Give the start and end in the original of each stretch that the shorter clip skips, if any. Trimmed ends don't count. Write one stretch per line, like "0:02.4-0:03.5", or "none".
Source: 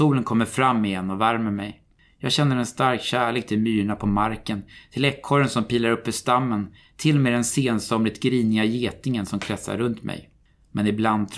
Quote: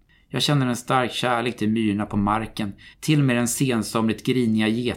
0:04.8-0:06.9